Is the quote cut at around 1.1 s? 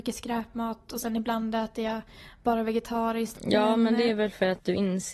no; 1 cut; at 3.3 s

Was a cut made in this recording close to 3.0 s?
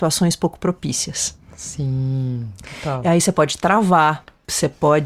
no; 0 cuts

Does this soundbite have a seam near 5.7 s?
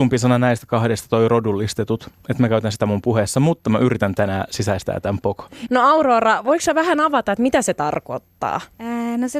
yes; 1 cut; at 5.7 s

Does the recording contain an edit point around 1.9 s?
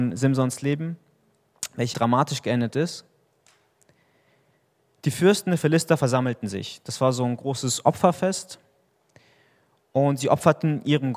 yes; 1 cut; at 1.9 s

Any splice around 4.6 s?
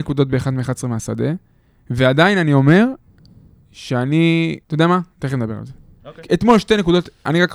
yes; 1 cut; at 4.6 s

